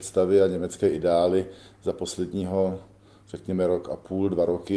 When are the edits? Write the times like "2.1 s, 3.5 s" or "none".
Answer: none